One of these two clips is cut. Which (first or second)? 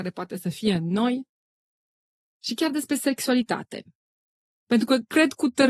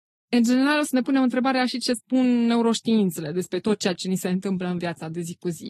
first